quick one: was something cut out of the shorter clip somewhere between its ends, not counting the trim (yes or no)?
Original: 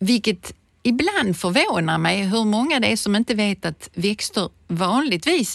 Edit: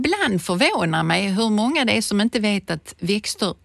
no